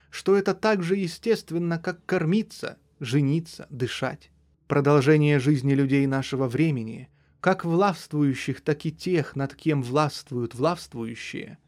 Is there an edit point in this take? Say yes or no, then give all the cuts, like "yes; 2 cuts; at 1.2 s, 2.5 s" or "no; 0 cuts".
yes; 1 cut; at 4.5 s